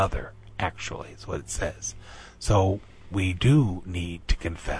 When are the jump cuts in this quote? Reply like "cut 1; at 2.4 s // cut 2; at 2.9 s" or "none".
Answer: none